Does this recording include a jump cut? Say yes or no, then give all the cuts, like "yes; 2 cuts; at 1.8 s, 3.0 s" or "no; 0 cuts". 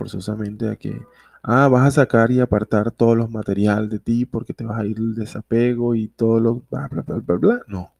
no; 0 cuts